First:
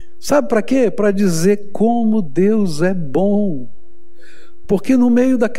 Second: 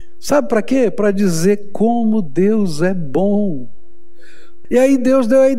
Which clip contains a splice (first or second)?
second